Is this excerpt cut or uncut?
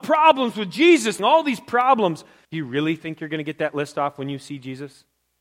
cut